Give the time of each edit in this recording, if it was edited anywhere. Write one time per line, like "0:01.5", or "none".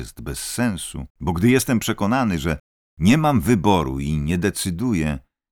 0:01.1